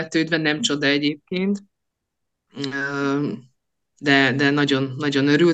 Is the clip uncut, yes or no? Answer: yes